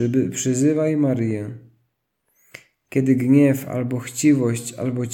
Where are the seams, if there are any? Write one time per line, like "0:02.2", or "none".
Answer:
none

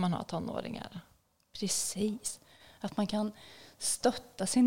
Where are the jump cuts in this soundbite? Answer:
none

